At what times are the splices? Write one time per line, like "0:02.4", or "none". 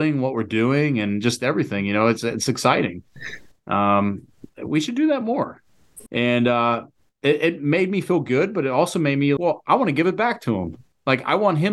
0:06.1
0:09.4